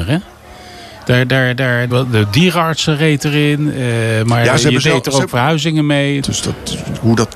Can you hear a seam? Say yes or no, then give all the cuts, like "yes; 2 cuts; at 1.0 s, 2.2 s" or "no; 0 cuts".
yes; 2 cuts; at 1.9 s, 6.2 s